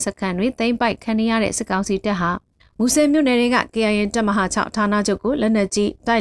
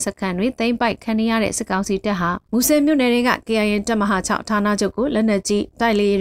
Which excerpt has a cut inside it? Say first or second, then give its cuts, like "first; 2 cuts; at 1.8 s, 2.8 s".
second; 1 cut; at 2.4 s